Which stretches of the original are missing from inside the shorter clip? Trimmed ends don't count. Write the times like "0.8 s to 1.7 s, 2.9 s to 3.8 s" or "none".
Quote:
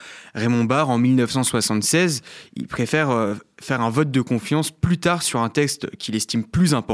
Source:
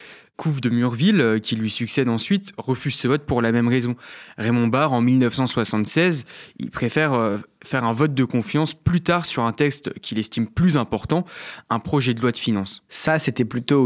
none